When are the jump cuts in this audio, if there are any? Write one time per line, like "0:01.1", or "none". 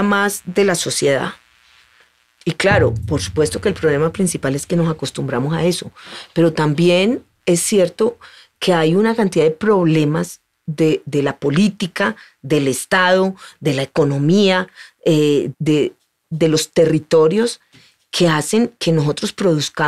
0:15.5